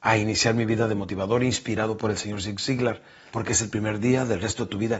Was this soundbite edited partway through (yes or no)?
yes